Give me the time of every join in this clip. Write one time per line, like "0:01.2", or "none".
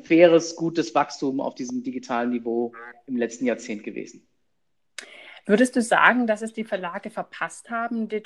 none